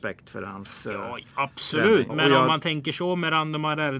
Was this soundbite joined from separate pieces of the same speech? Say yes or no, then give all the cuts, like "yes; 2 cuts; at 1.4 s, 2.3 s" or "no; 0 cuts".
yes; 1 cut; at 2.1 s